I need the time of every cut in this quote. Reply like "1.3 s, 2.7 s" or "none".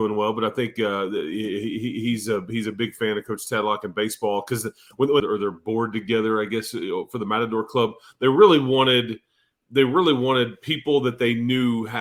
5.2 s